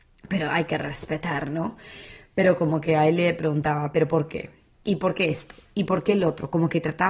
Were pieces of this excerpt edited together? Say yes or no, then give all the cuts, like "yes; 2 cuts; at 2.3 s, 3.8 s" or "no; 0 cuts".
no; 0 cuts